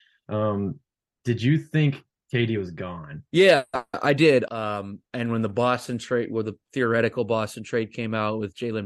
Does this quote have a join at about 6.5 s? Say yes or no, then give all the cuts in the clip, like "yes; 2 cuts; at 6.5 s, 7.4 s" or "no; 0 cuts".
no; 2 cuts; at 3.3 s, 4.5 s